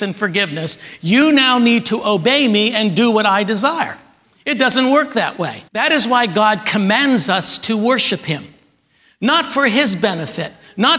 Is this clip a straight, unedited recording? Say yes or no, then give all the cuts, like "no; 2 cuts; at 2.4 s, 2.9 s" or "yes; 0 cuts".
no; 1 cut; at 5.7 s